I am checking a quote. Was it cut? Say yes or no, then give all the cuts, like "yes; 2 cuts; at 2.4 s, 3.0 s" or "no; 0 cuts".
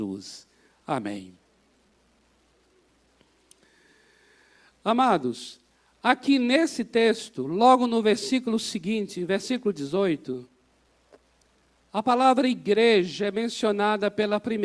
no; 0 cuts